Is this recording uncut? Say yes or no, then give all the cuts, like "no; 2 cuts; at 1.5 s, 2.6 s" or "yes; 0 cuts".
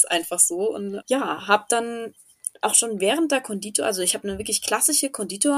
no; 1 cut; at 1.0 s